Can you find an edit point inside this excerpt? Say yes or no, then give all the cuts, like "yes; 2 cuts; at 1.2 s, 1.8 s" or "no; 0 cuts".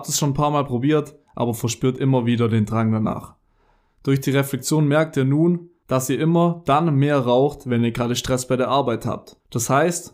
no; 0 cuts